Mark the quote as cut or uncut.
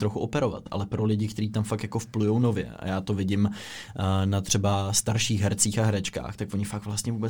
uncut